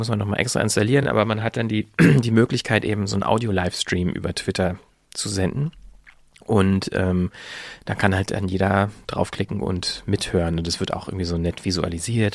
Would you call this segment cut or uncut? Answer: uncut